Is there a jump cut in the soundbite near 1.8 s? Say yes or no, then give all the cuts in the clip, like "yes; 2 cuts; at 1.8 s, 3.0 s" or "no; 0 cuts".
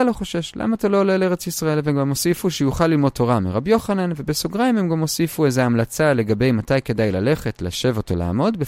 no; 0 cuts